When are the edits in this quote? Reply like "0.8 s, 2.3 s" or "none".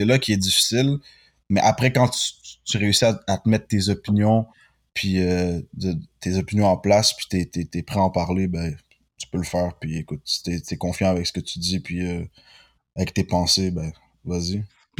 none